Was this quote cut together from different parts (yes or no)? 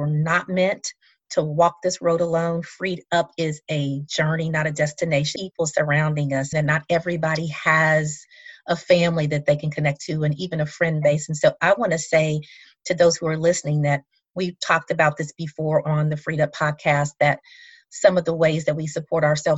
yes